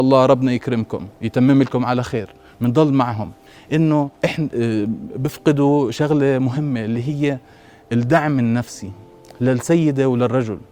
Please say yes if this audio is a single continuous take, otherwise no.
no